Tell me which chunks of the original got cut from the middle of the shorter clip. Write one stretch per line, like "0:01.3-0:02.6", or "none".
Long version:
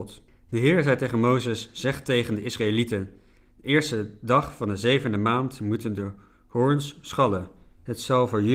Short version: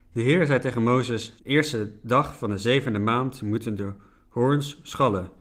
0:01.7-0:03.5